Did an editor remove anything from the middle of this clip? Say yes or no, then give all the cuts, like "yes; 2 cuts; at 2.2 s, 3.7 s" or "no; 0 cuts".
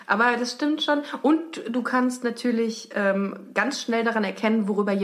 no; 0 cuts